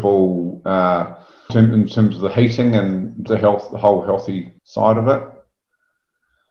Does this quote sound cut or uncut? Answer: cut